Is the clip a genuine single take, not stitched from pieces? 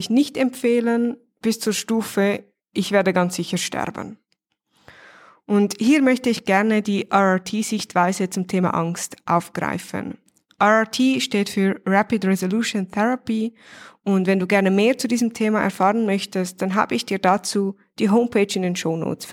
yes; 0 cuts

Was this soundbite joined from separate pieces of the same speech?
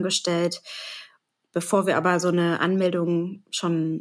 no; 0 cuts

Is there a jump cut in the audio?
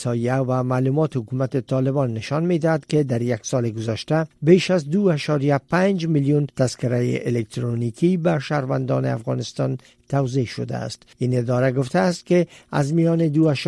yes; 1 cut; at 11.1 s

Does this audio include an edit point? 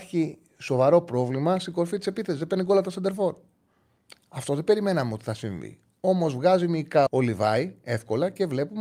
yes; 1 cut; at 7.1 s

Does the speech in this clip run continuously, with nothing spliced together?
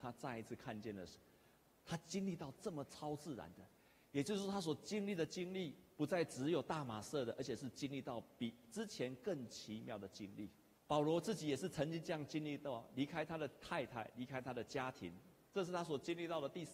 no; 1 cut; at 10.8 s

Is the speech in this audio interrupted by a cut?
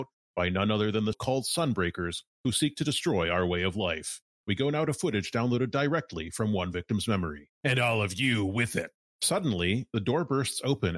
yes; 3 cuts; at 1.1 s, 7.6 s, 9.1 s

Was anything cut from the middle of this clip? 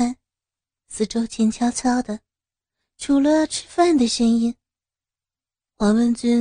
no; 0 cuts

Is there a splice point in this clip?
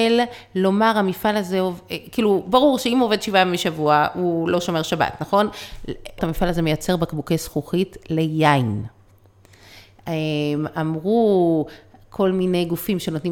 yes; 1 cut; at 6.2 s

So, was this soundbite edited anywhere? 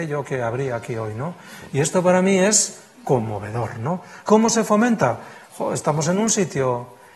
yes; 1 cut; at 4.2 s

